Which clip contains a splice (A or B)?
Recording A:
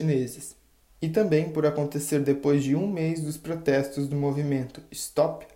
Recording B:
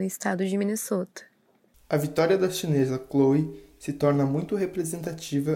B